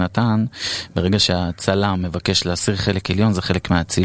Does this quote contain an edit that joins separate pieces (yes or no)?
no